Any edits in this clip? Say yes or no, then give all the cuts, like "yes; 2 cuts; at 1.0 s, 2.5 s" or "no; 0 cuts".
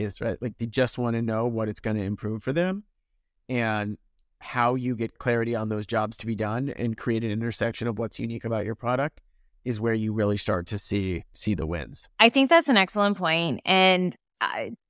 no; 0 cuts